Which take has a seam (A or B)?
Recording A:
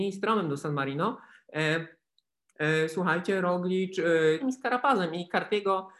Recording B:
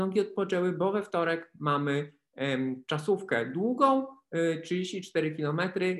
A